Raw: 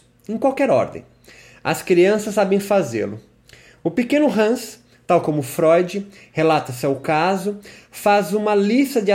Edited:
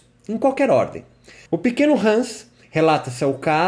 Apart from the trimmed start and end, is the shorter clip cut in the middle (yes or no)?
yes